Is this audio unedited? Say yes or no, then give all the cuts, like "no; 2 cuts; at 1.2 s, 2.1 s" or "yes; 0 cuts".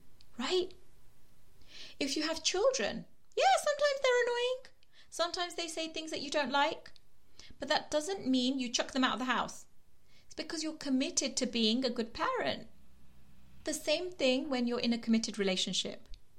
yes; 0 cuts